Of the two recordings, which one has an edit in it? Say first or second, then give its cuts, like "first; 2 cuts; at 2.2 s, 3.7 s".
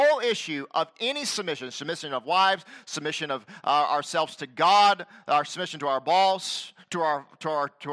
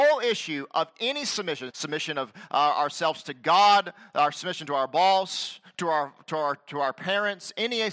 second; 1 cut; at 1.7 s